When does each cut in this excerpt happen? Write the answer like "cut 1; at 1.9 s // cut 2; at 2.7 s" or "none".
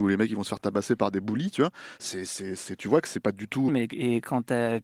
cut 1; at 3.7 s